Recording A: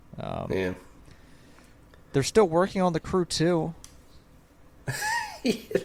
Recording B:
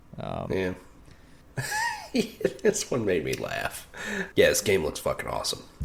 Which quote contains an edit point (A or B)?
B